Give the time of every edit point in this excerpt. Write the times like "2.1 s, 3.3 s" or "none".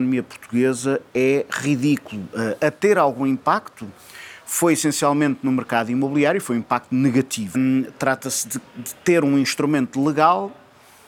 7.5 s